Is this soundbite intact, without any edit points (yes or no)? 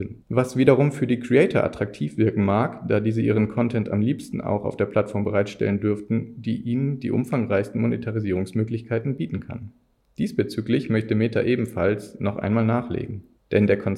yes